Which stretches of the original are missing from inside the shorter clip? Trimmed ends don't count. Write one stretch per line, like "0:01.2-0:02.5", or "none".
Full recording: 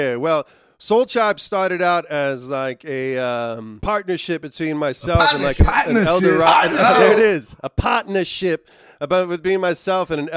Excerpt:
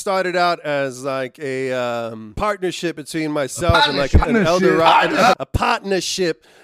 0:05.7-0:05.8
0:06.9-0:07.6